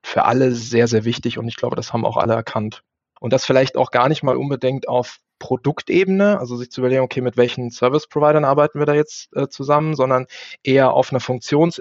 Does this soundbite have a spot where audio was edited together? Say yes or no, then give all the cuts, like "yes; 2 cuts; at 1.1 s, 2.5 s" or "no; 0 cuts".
yes; 1 cut; at 3.2 s